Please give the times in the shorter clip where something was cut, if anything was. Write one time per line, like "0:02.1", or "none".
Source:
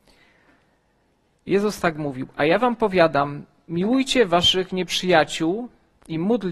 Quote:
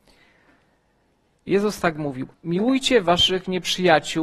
0:02.3